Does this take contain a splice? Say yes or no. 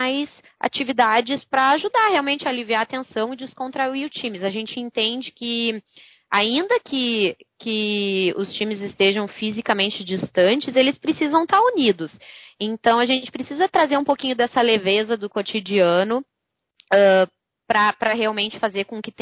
no